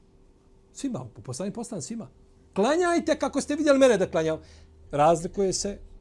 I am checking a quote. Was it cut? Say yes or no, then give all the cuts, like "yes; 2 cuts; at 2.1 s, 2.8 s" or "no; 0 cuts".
yes; 1 cut; at 4.9 s